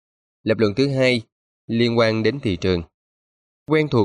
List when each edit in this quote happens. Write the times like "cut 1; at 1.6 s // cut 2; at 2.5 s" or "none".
none